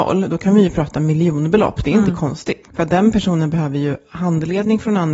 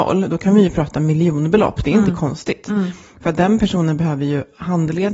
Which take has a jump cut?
first; 1 cut; at 2.6 s

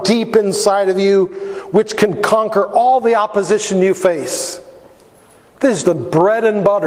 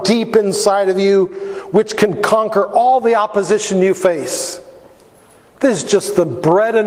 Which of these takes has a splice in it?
first; 1 cut; at 5.8 s

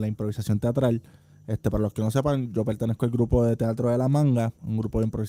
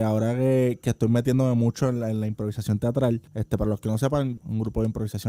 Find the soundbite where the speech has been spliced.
second; 2 cuts; at 3.3 s, 4.4 s

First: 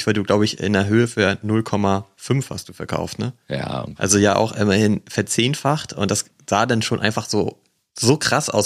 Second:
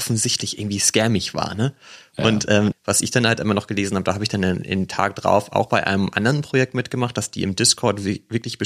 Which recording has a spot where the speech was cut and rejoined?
second; 1 cut; at 2.7 s

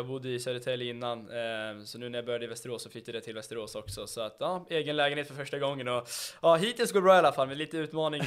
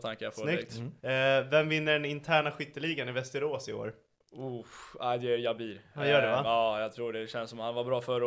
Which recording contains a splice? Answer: second; 1 cut; at 1.0 s

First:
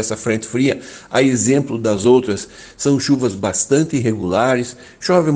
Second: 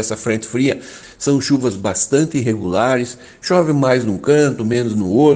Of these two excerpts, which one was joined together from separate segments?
second; 1 cut; at 1.0 s

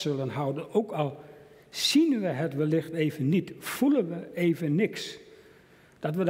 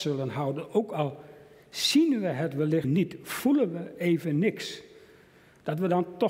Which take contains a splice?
second; 1 cut; at 2.8 s

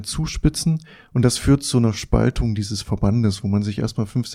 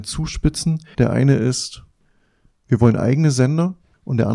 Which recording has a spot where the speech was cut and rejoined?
second; 1 cut; at 0.9 s

